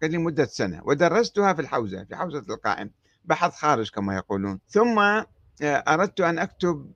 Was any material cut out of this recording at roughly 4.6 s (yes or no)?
yes